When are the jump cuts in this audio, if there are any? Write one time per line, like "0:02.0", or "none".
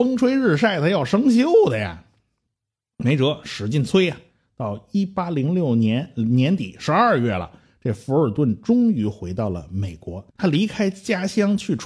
0:10.3